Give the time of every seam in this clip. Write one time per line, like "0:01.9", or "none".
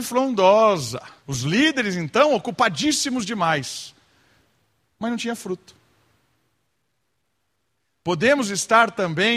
0:01.2